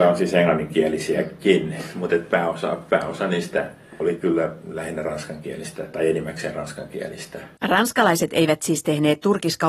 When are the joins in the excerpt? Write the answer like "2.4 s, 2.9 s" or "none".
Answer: 7.6 s